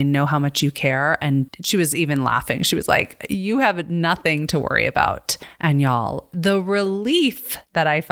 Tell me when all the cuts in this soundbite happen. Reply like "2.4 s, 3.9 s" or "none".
none